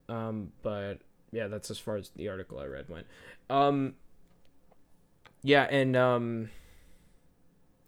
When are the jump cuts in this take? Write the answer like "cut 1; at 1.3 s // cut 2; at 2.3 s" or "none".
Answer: none